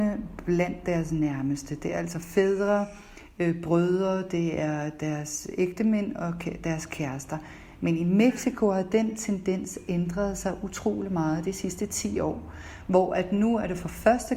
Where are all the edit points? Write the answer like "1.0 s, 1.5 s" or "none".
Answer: none

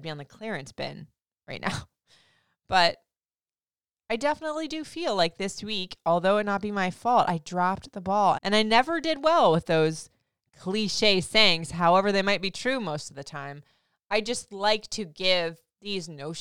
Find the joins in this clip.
8.3 s

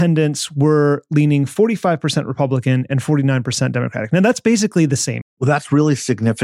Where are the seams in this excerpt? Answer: 5.2 s

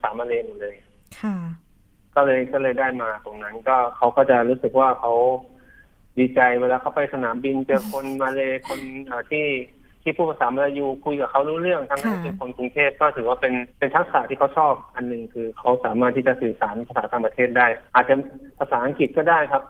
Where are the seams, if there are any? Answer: 13.7 s, 17.9 s

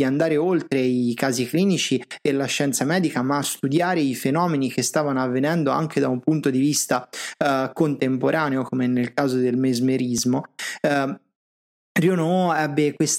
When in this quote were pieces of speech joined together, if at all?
none

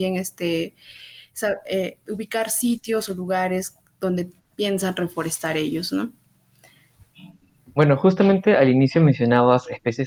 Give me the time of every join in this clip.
none

